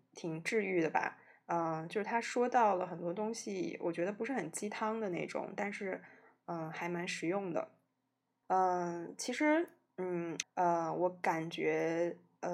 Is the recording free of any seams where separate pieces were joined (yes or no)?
no